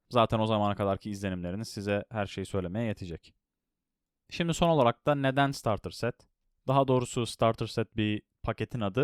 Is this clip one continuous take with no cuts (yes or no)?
yes